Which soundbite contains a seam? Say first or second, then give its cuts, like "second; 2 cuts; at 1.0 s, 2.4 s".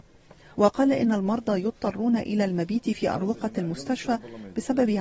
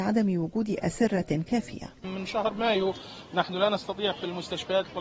second; 1 cut; at 2.0 s